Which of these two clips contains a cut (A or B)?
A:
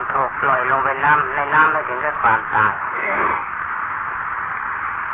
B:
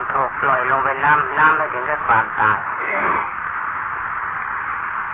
B